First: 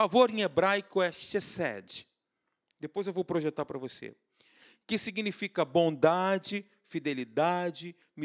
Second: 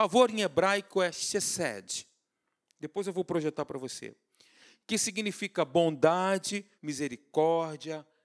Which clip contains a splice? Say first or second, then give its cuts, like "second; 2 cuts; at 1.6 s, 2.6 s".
second; 1 cut; at 6.8 s